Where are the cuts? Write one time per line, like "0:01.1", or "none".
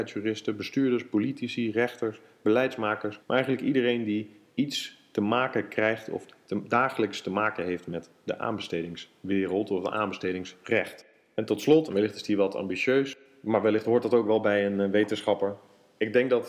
0:03.2
0:11.9